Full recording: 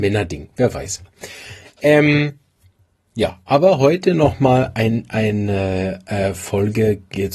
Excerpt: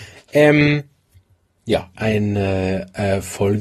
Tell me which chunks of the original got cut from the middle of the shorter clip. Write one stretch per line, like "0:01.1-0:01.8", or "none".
0:03.4-0:05.1